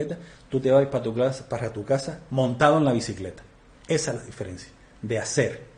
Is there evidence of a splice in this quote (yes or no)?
no